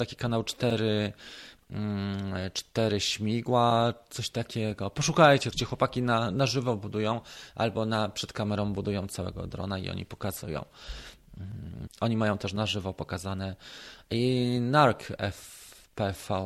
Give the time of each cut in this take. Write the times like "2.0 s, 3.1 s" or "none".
5.5 s, 11.9 s

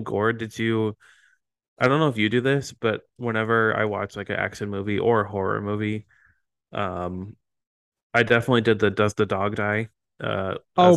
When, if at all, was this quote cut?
none

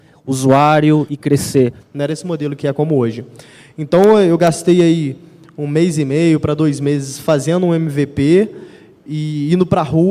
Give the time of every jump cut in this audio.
1.8 s

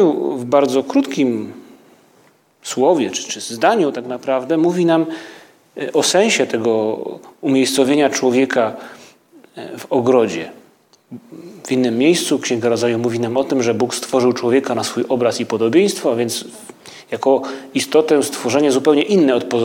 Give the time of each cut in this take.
none

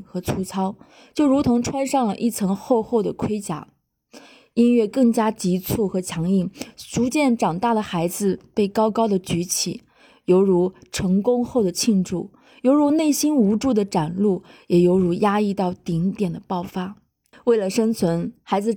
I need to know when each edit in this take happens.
17.3 s

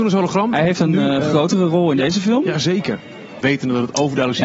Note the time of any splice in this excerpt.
3.4 s

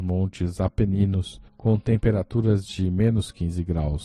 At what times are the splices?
none

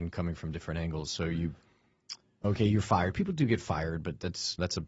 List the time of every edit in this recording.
2.4 s

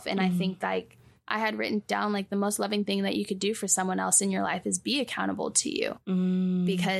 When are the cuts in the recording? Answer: none

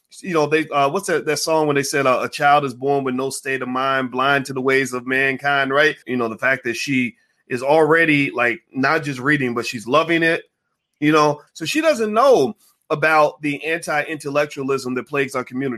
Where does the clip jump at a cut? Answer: 6.0 s, 11.5 s

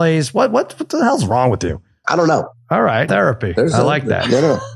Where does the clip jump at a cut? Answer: 2.0 s, 3.1 s

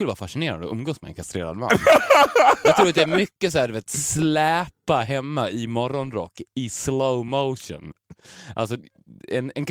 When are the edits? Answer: none

